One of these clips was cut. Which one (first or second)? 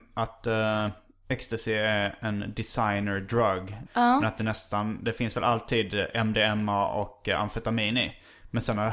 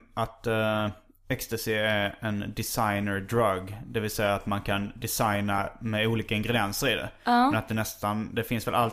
first